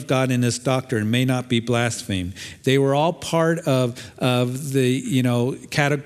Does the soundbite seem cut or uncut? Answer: cut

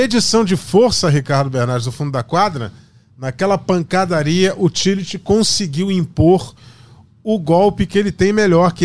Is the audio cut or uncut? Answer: uncut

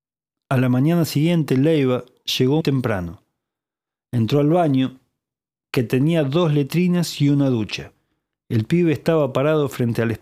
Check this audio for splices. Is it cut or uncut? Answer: cut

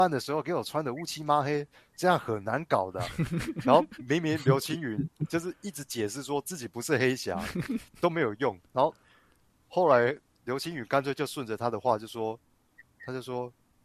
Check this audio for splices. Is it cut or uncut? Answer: uncut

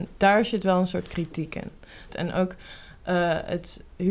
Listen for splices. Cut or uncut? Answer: cut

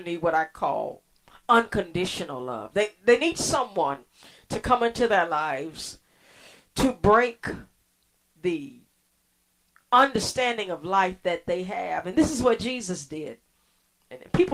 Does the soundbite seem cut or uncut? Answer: uncut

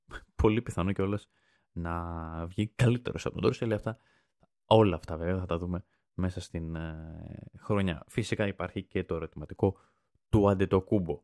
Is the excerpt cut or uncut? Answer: uncut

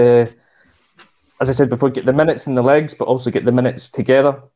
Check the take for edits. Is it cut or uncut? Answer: uncut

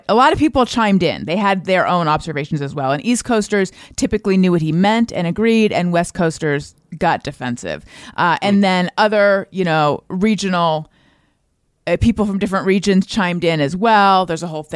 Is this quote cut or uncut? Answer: uncut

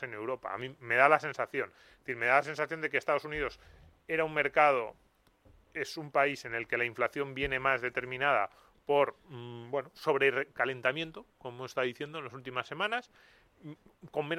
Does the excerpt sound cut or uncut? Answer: uncut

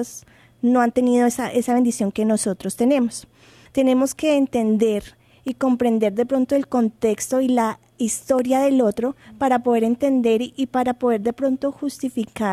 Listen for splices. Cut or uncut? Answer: cut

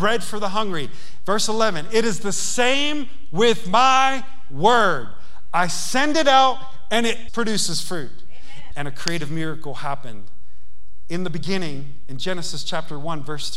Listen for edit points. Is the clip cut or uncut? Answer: cut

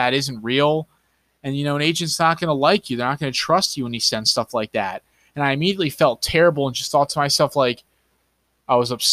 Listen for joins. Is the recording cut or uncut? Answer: uncut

